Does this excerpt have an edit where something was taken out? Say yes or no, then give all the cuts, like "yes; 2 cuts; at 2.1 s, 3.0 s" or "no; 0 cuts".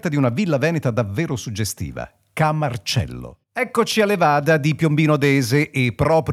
yes; 1 cut; at 3.4 s